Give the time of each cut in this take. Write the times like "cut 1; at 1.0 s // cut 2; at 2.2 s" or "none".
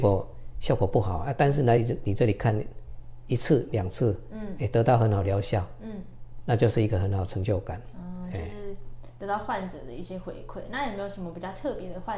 none